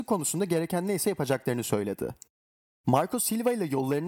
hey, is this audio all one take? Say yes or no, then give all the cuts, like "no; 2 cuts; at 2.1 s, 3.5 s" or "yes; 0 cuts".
no; 1 cut; at 2.8 s